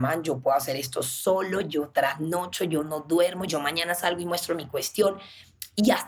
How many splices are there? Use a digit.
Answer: 1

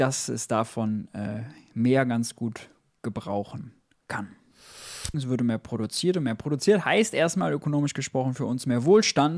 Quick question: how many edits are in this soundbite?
1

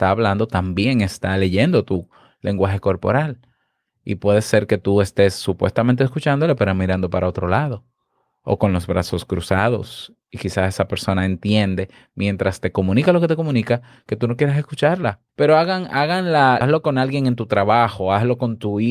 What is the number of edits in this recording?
2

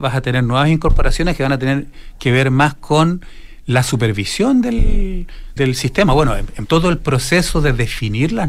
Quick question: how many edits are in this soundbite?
2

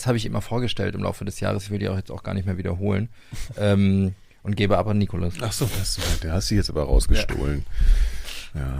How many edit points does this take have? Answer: 0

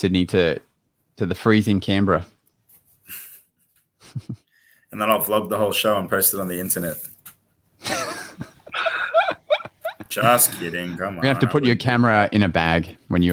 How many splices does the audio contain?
0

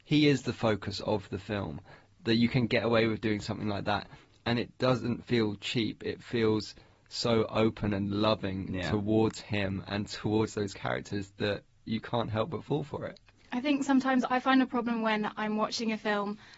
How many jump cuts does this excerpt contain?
0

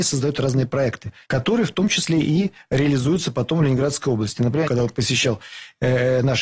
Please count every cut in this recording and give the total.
2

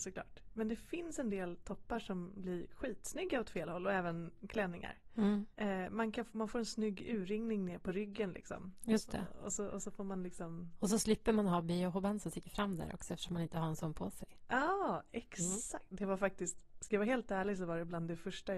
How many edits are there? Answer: 0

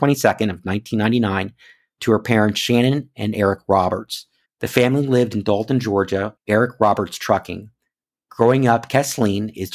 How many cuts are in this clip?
2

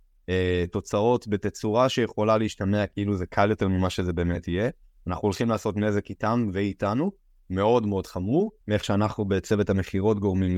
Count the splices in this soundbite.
1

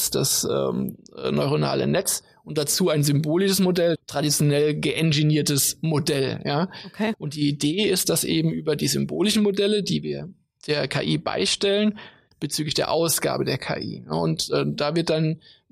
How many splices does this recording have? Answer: 3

